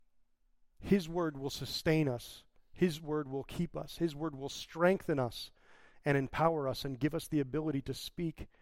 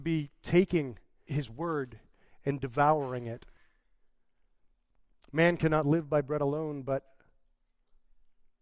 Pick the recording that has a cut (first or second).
second